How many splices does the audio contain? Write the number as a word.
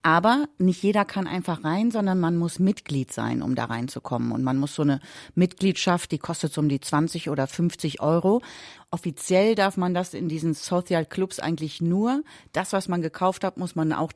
one